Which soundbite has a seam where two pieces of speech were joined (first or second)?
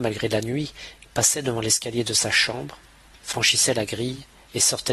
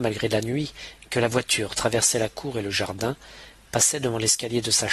first